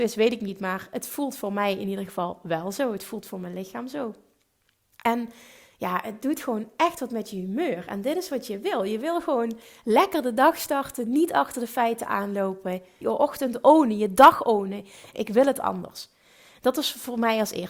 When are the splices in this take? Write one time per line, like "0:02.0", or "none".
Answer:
0:13.0
0:15.1